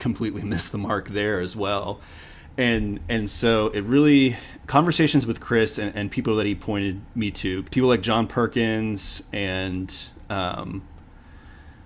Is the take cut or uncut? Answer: cut